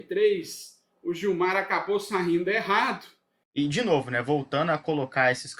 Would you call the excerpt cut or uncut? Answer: cut